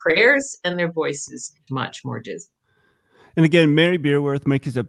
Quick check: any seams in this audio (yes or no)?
yes